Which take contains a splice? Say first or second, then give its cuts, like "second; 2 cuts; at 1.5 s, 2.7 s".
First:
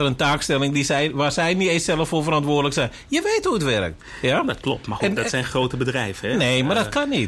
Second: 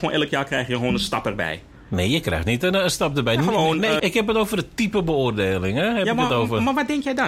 second; 2 cuts; at 2.7 s, 4.0 s